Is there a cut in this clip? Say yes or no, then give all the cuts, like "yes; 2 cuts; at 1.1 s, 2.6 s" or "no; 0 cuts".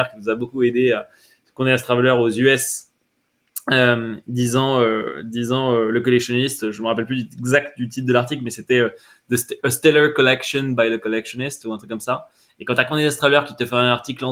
no; 0 cuts